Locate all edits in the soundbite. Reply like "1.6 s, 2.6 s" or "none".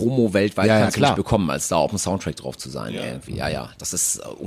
none